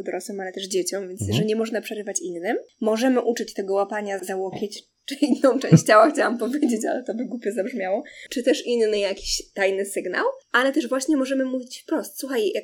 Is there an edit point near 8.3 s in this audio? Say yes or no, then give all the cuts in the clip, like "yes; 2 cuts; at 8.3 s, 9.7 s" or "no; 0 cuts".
yes; 2 cuts; at 4.2 s, 8.3 s